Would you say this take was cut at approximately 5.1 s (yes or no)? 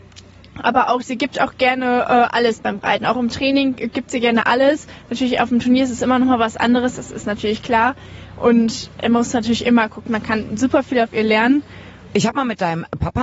no